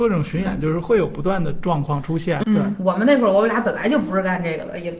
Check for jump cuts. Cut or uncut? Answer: cut